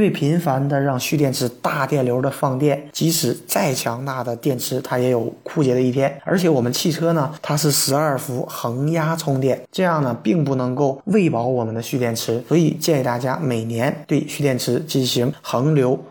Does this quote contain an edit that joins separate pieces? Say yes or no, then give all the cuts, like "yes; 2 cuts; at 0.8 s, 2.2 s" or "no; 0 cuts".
no; 0 cuts